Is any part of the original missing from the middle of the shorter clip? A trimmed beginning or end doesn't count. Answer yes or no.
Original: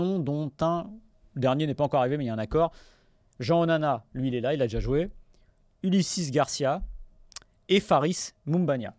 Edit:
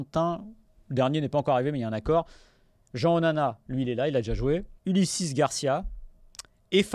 yes